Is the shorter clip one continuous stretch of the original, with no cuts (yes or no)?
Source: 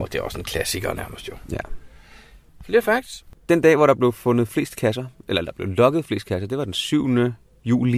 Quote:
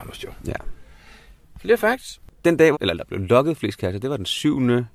no